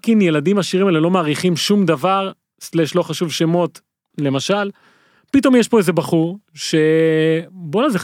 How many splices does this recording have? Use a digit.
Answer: 1